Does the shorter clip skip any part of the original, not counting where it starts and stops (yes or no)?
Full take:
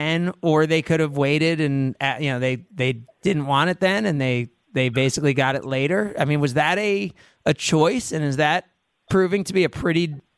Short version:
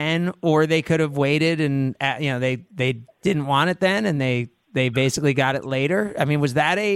no